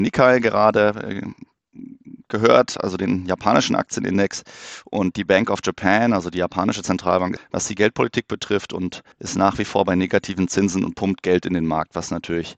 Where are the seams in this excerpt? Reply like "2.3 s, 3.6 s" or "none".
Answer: 7.4 s, 9.1 s